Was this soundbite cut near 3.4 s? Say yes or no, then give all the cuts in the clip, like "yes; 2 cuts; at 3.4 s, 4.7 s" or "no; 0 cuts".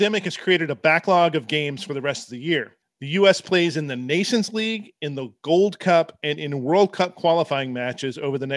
no; 0 cuts